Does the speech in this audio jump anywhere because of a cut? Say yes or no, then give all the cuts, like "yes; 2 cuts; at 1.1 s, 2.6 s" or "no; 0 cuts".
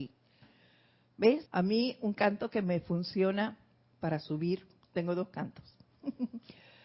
yes; 1 cut; at 1.5 s